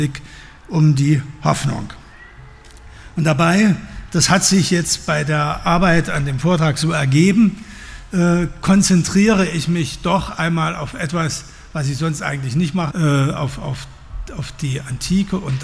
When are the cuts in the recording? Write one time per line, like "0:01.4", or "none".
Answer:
0:12.9